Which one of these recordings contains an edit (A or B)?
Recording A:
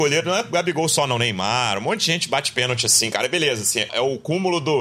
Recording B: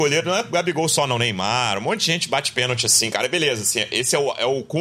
A